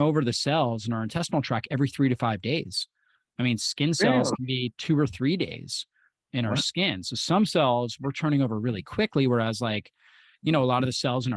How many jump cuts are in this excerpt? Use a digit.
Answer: 0